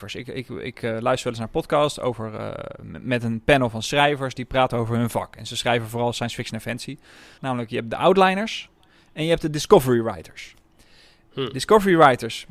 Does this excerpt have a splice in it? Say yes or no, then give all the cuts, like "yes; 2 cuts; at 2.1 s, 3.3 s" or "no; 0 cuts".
yes; 1 cut; at 7.4 s